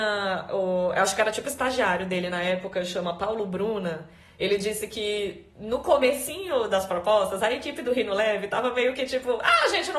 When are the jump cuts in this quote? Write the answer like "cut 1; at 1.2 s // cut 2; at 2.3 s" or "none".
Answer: none